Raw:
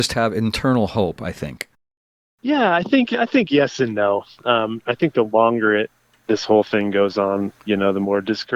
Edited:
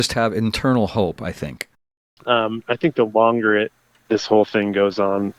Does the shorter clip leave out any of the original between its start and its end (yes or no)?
yes